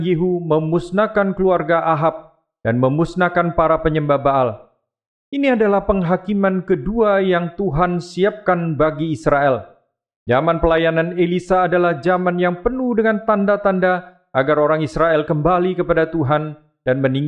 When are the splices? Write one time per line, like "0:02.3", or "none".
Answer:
none